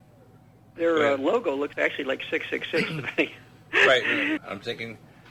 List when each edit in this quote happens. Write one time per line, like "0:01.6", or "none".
0:04.4

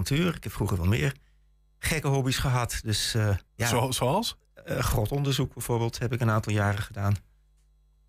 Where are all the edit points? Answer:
0:03.5

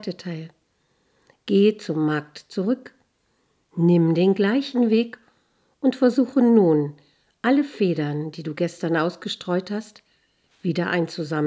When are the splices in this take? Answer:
none

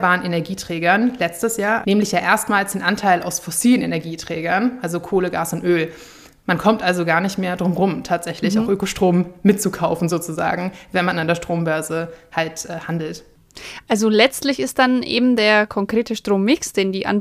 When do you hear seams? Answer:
0:01.8

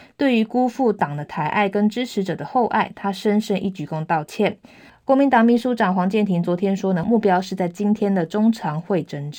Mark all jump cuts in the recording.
0:04.9
0:07.0

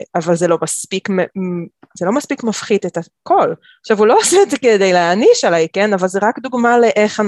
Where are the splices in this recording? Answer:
none

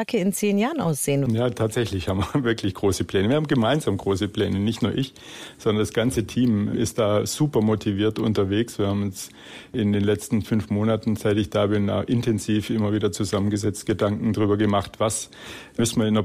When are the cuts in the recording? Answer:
0:01.3

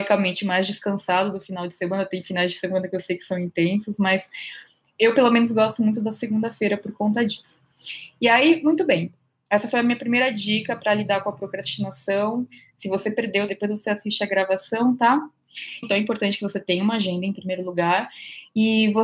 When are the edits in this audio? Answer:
0:13.5
0:15.8

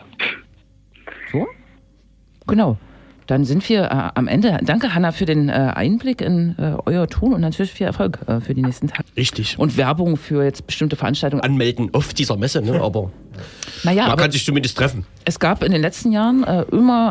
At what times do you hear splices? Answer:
0:09.0
0:11.4

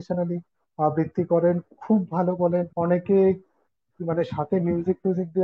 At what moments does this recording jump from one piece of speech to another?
0:02.7

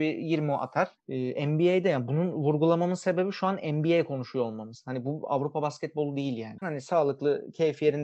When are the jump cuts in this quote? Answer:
0:01.0
0:06.6

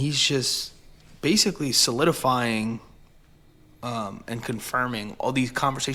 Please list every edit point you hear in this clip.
none

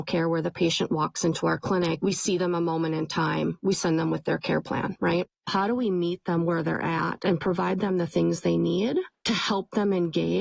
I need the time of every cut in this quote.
none

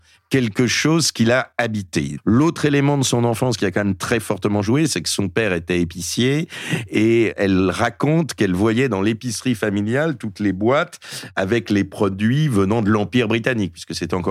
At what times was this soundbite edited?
0:02.2

